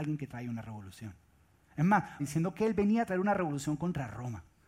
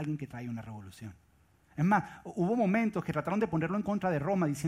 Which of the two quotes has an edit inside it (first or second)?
first